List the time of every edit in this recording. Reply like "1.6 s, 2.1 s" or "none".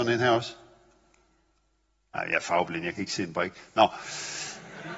none